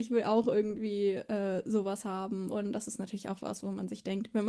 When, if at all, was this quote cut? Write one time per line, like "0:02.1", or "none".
0:02.5